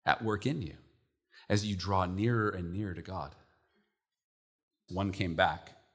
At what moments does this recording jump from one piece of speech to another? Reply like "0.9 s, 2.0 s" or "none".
4.9 s